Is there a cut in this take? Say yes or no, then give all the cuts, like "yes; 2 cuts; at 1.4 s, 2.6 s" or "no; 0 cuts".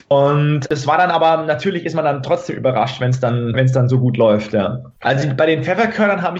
yes; 2 cuts; at 3.5 s, 5.0 s